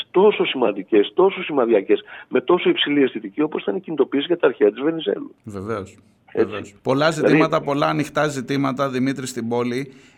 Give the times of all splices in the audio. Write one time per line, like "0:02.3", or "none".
0:06.8